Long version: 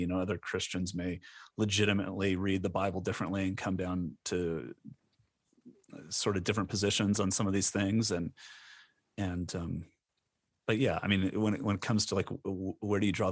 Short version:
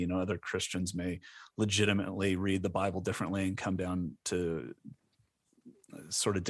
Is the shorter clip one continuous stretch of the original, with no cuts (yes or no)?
yes